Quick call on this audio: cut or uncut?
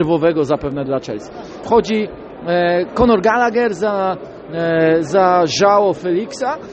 cut